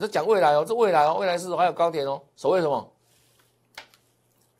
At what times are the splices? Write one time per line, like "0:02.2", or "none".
0:02.3